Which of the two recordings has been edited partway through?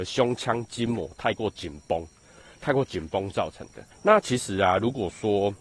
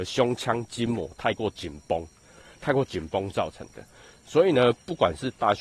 first; 1 cut; at 3.9 s

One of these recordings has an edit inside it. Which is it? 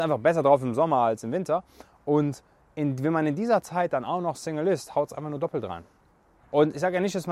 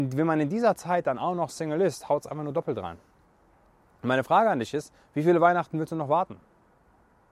first; 1 cut; at 6.4 s

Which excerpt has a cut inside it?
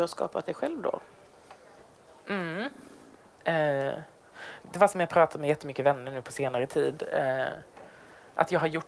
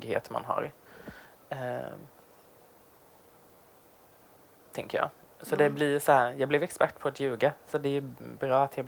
first; 1 cut; at 4.6 s

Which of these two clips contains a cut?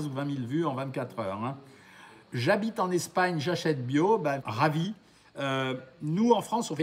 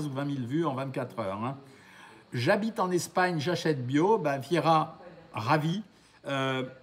first; 1 cut; at 4.4 s

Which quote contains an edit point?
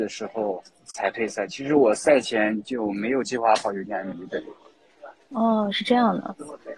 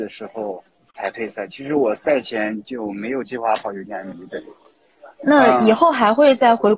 second; 1 cut; at 5.2 s

